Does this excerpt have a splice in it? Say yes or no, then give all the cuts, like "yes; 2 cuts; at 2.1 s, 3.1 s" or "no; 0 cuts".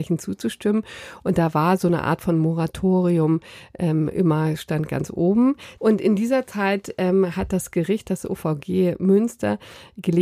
yes; 1 cut; at 5.8 s